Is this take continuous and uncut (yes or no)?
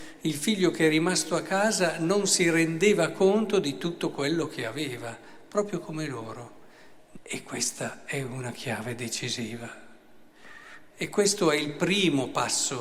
no